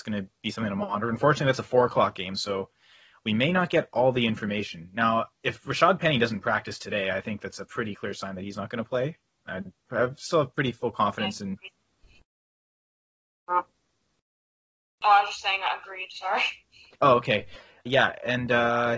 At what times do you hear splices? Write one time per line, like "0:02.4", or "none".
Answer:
0:17.9